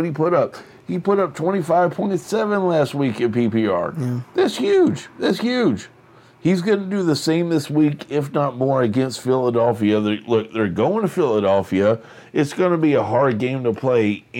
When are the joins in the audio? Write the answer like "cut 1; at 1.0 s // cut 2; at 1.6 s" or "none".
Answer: none